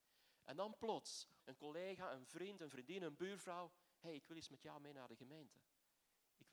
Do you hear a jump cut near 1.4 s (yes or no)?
yes